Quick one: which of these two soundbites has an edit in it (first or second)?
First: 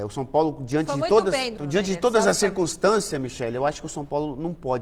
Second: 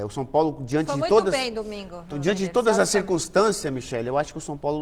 first